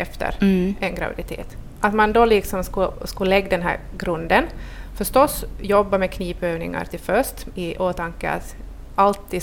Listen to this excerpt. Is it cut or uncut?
cut